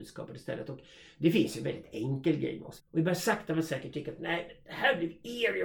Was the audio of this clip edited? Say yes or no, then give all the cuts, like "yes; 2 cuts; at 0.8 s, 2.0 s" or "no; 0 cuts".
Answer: yes; 1 cut; at 2.8 s